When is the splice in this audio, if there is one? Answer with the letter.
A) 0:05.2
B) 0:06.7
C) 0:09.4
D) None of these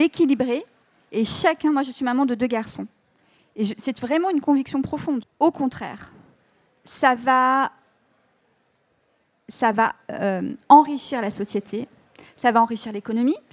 A